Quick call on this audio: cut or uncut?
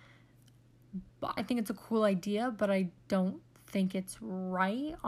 cut